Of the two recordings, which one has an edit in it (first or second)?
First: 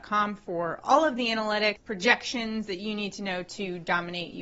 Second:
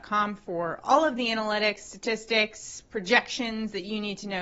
first